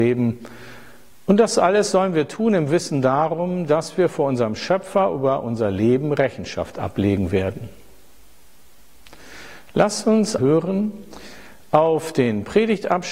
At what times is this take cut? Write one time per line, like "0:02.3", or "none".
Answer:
0:10.4